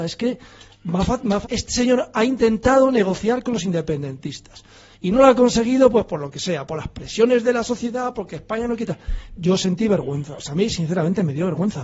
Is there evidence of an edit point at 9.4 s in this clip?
yes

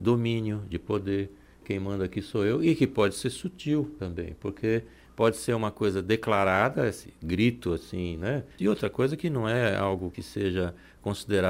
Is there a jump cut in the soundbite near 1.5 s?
no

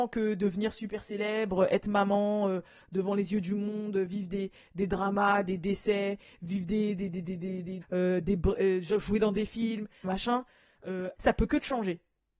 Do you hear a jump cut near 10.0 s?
yes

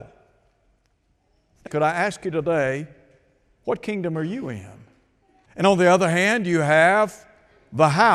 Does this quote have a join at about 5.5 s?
yes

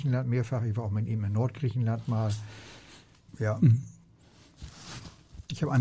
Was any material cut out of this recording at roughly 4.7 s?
no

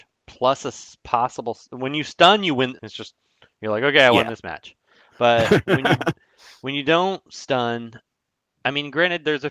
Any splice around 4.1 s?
no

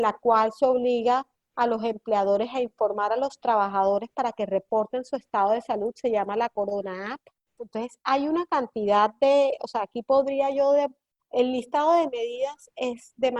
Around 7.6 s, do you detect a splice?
yes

